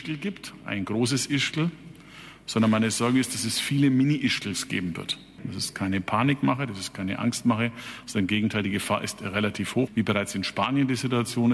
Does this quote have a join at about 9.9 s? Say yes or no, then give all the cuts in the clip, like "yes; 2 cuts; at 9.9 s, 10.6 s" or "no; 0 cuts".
yes; 1 cut; at 9.9 s